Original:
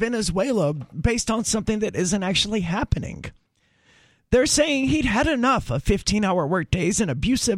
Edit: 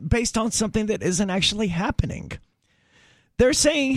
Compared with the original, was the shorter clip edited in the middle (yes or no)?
no